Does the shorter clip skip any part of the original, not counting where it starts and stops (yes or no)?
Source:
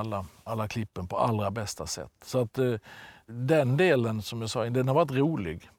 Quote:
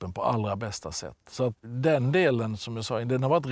yes